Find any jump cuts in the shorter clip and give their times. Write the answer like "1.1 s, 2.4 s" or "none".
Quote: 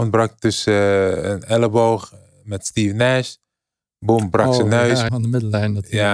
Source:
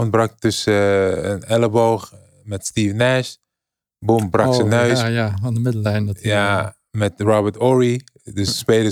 5.1 s